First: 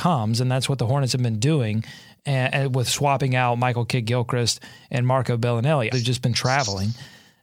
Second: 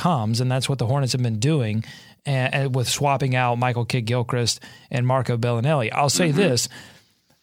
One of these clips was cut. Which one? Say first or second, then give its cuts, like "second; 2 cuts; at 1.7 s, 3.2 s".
first; 1 cut; at 5.9 s